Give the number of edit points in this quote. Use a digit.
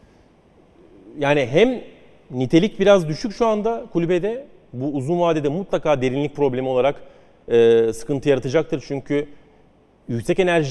0